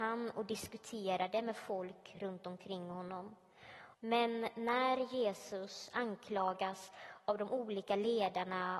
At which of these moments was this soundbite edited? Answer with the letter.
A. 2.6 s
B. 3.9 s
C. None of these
B